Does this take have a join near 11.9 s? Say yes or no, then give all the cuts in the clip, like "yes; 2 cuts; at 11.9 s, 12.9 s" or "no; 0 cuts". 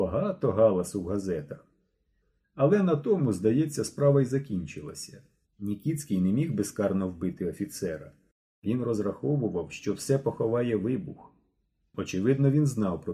no; 1 cut; at 5.4 s